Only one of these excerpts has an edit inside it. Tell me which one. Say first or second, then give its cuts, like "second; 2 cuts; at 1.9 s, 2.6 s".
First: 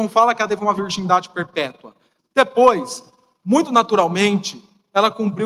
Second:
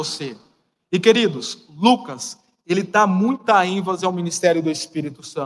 first; 1 cut; at 2.2 s